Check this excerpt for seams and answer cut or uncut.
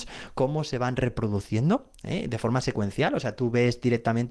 uncut